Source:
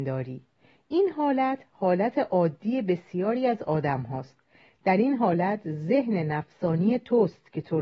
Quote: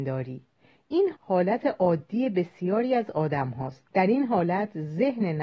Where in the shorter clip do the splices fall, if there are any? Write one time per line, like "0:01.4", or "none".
0:01.1
0:03.9